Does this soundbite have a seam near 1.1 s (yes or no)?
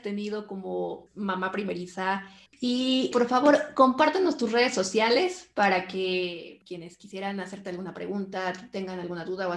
yes